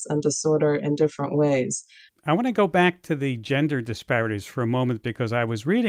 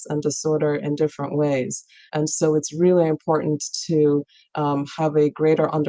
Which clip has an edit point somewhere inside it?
first; 1 cut; at 2.1 s

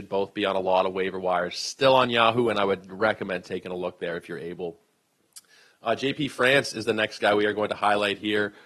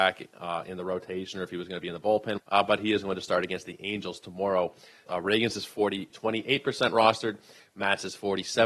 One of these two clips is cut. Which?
second; 3 cuts; at 2.4 s, 5.1 s, 6.1 s

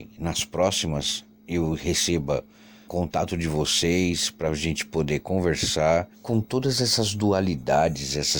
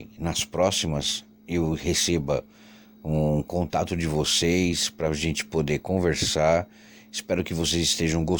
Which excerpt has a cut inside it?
first; 2 cuts; at 2.9 s, 6.1 s

